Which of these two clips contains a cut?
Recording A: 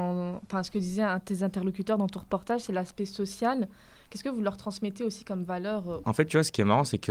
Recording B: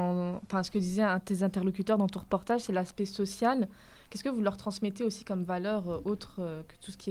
A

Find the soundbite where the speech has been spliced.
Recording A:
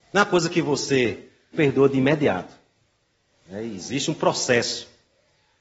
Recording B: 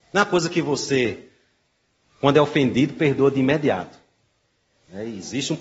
A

